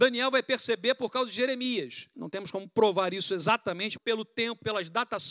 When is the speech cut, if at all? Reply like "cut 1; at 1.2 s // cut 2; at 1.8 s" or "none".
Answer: cut 1; at 2.1 s // cut 2; at 4.0 s